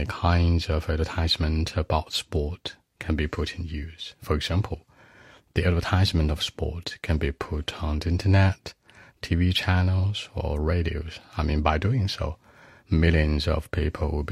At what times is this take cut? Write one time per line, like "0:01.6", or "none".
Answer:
none